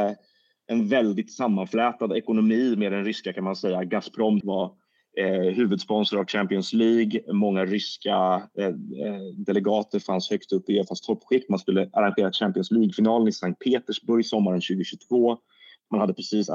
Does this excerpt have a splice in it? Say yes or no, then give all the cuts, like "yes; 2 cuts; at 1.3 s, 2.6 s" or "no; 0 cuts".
yes; 1 cut; at 4.4 s